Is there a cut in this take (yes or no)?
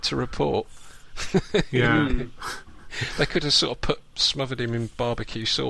no